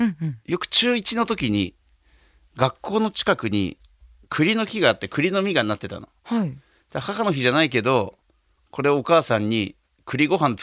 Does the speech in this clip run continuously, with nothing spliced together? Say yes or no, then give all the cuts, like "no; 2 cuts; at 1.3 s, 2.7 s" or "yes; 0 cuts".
yes; 0 cuts